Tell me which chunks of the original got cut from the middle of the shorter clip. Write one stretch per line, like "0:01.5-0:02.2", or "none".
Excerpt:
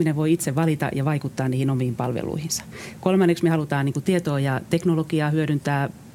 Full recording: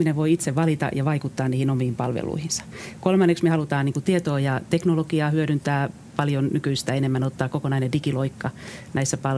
none